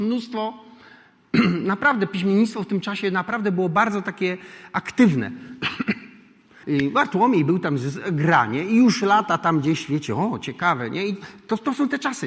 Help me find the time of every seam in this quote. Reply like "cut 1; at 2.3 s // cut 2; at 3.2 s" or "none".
cut 1; at 6.6 s